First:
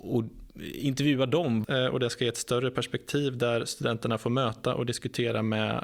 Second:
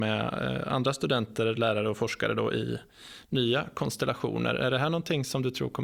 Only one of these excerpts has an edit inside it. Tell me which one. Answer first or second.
first